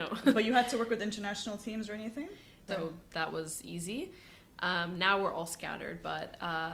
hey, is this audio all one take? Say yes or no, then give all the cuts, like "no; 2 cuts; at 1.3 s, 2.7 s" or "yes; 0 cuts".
no; 1 cut; at 2.7 s